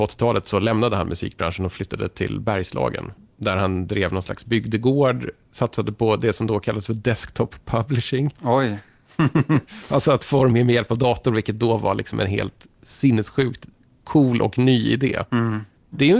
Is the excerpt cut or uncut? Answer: uncut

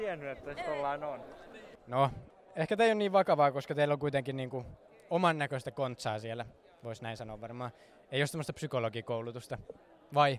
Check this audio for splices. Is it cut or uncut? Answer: cut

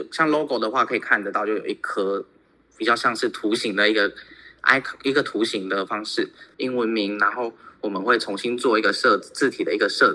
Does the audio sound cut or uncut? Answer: cut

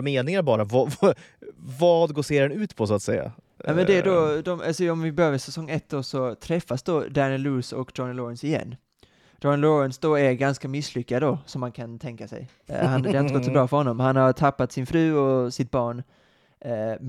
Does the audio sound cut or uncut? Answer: uncut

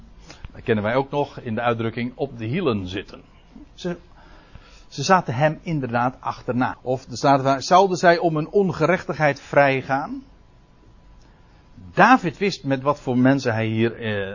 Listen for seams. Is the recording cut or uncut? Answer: cut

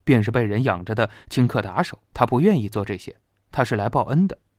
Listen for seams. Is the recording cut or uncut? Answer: cut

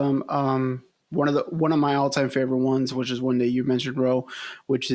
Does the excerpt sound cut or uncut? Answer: uncut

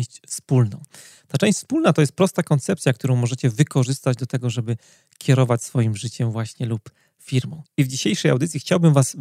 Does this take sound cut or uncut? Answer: uncut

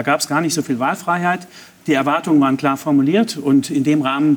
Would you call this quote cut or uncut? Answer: uncut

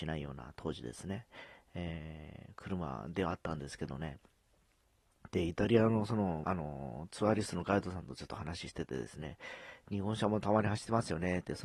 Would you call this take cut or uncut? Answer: cut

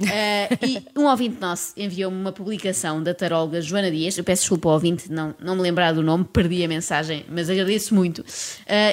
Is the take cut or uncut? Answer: uncut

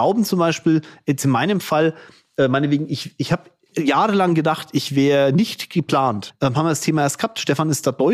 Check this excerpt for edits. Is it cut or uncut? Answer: cut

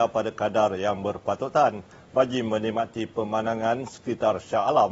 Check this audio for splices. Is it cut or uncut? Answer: uncut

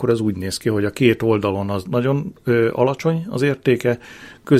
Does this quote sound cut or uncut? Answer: cut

